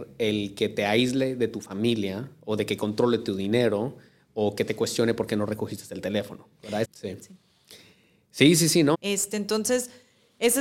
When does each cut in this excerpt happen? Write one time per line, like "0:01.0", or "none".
0:06.8
0:08.9